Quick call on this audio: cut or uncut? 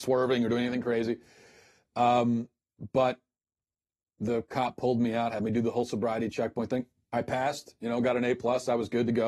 uncut